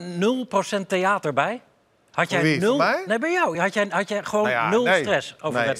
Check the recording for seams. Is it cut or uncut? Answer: uncut